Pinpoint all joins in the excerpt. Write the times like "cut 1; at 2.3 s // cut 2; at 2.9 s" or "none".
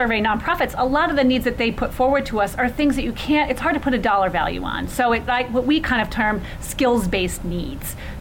cut 1; at 5.3 s